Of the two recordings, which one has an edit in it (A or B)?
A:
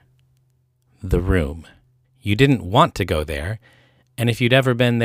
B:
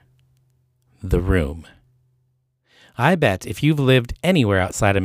A